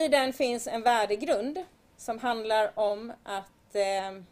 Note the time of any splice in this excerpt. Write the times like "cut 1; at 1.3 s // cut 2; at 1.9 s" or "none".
none